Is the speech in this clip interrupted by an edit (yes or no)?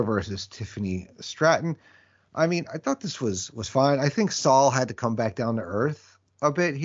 no